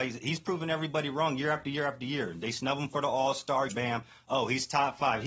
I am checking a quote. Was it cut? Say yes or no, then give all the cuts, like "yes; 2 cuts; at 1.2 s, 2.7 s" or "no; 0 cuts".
yes; 1 cut; at 3.7 s